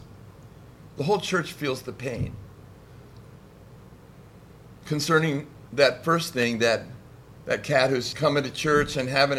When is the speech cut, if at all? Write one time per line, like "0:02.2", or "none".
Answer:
0:04.8
0:08.1

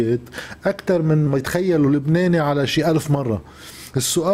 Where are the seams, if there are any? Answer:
0:01.3

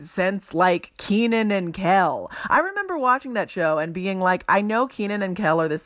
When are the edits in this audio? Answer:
none

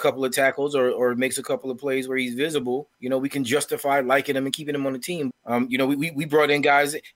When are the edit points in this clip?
0:02.9
0:05.3

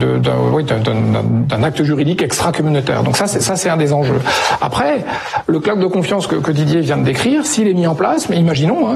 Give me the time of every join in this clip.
none

